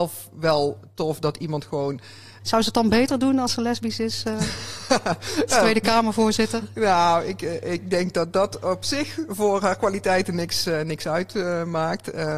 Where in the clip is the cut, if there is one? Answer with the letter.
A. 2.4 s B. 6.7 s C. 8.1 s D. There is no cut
A